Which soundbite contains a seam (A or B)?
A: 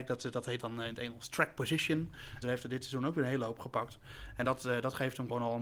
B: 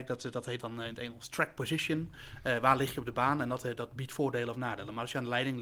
A